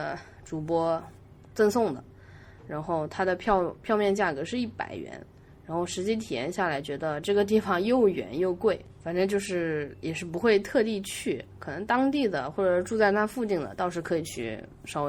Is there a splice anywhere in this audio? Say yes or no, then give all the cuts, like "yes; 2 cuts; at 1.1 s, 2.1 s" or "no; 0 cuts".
no; 0 cuts